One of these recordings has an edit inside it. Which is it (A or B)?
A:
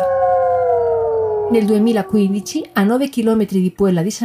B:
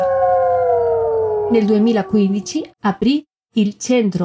B